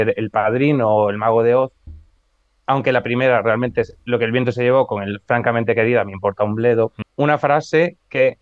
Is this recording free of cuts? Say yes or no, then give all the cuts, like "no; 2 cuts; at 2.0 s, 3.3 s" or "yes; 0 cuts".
no; 1 cut; at 7.0 s